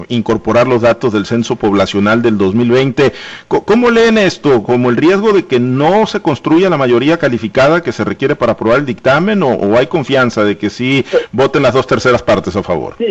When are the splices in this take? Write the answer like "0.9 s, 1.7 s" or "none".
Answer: none